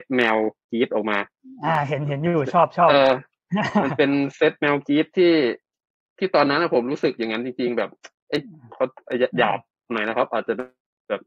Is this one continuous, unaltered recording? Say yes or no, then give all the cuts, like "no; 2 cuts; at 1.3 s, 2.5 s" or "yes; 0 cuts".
yes; 0 cuts